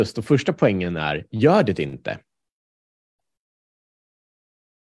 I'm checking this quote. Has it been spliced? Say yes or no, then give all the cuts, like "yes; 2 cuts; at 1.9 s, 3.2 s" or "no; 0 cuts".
no; 0 cuts